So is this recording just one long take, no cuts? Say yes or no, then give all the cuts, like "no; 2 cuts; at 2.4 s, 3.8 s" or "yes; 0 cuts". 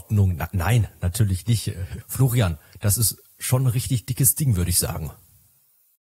no; 1 cut; at 2.0 s